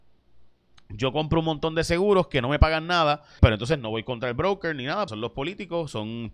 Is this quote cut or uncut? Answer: cut